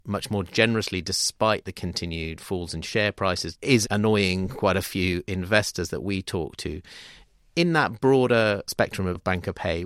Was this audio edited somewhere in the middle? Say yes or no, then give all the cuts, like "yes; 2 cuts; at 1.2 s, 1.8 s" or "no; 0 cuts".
yes; 1 cut; at 3.6 s